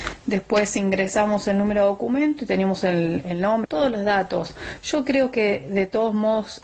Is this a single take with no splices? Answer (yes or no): no